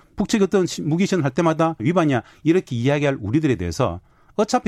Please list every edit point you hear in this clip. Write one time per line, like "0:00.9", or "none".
0:01.8